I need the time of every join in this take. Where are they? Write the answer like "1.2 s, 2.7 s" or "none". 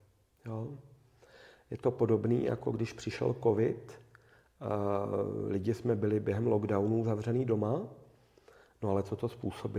none